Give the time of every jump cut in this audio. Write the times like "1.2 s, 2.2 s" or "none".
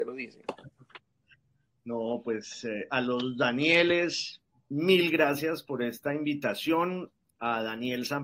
none